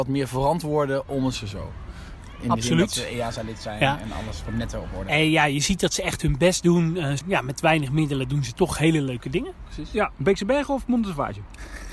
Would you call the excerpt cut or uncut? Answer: cut